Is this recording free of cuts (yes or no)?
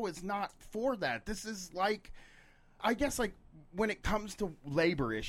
no